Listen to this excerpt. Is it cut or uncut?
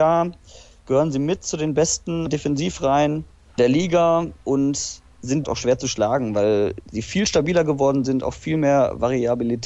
cut